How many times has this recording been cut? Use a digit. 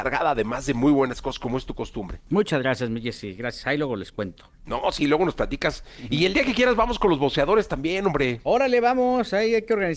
1